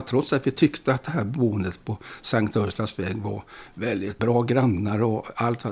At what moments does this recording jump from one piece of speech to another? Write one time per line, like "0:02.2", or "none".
0:04.2